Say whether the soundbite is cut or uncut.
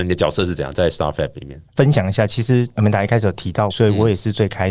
cut